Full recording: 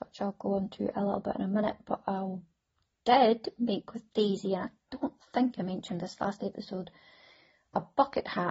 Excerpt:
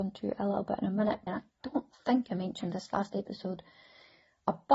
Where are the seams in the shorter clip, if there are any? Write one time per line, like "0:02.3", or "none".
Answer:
0:01.3